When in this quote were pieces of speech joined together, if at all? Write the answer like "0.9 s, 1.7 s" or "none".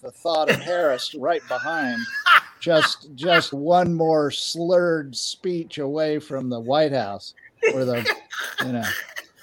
3.5 s

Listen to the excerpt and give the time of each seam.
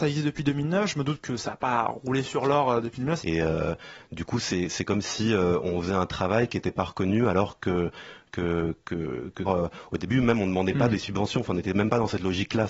3.2 s, 9.5 s

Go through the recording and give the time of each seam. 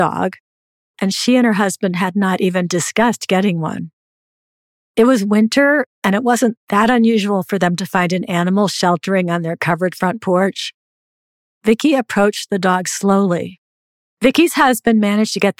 4.8 s, 14.0 s

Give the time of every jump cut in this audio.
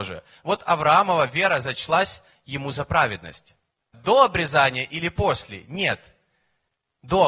3.9 s

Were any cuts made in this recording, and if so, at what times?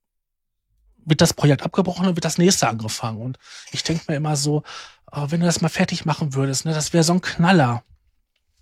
none

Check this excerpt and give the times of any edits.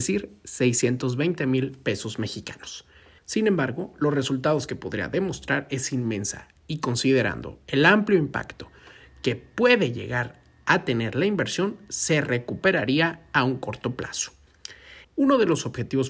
3.2 s, 15.0 s

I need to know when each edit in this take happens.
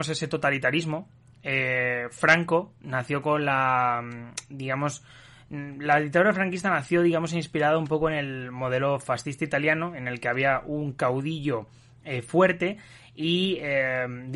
none

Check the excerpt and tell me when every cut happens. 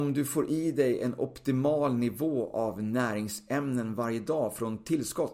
none

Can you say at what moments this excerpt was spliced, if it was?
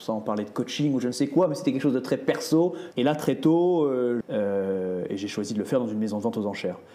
2.9 s, 4.2 s

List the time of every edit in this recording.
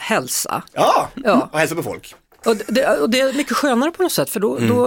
2.4 s

